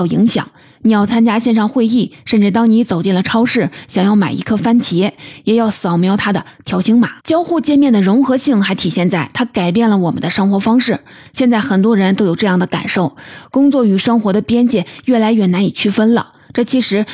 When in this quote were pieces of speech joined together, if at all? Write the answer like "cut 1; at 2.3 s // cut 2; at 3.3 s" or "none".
cut 1; at 7.2 s